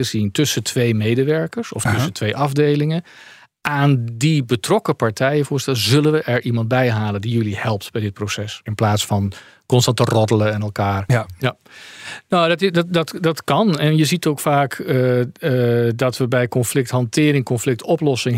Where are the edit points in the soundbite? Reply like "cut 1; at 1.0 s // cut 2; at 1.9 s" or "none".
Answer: cut 1; at 8.7 s // cut 2; at 11.4 s